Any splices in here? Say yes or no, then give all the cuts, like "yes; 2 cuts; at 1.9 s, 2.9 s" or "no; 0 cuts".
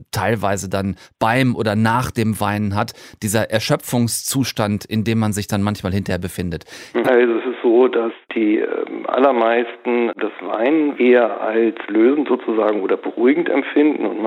yes; 2 cuts; at 7.0 s, 11.0 s